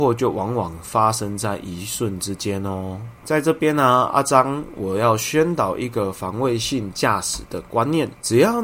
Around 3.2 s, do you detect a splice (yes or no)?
yes